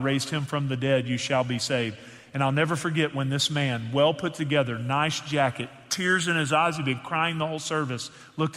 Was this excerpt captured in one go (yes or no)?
yes